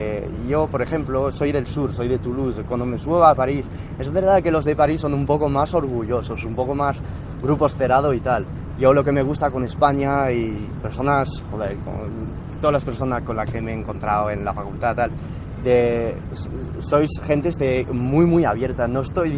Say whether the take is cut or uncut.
uncut